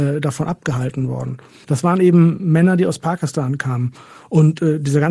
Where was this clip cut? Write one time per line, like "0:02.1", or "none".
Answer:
0:01.6